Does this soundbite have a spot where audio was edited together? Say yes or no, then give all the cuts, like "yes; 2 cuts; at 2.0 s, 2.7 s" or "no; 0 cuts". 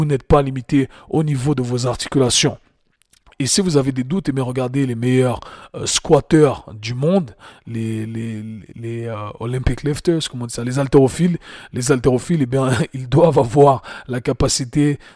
no; 0 cuts